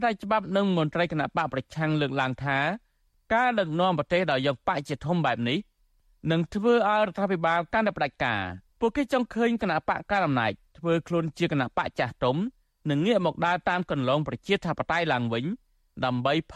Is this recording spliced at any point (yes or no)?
yes